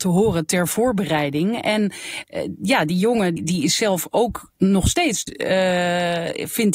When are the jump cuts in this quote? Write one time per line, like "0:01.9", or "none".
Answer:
0:03.4
0:05.3